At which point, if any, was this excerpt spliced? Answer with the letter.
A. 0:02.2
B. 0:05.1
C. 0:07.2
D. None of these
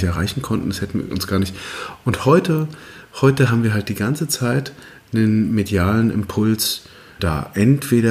C